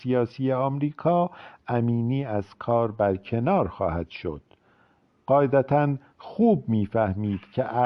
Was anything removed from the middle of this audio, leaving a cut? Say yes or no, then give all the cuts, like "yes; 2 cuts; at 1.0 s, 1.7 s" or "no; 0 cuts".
no; 0 cuts